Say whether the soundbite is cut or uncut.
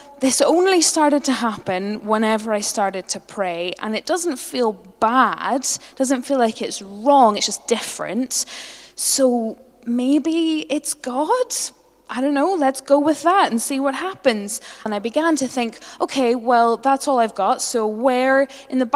cut